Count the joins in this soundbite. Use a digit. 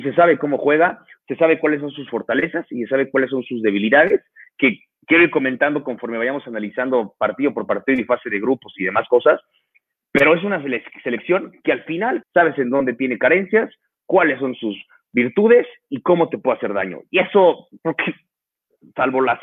1